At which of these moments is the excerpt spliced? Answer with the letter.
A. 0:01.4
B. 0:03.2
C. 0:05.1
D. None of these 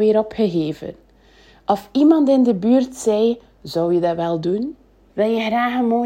C